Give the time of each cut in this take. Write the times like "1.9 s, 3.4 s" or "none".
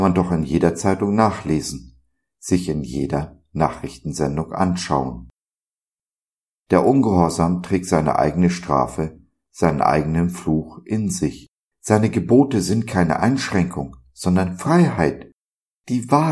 6.6 s, 11.7 s